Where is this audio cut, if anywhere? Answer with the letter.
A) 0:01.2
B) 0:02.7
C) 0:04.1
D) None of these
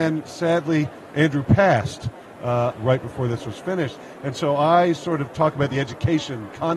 B